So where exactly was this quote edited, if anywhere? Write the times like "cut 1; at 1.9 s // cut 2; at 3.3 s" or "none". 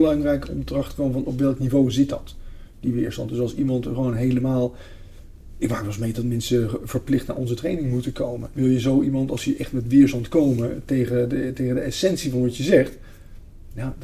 cut 1; at 8.5 s